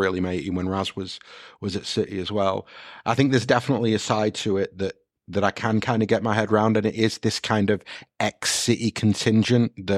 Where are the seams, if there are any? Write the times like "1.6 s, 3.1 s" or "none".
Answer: none